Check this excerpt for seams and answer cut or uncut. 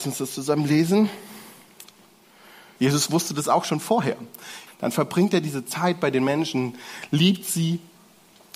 cut